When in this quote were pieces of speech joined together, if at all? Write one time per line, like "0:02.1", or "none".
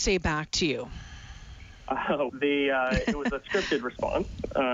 0:02.3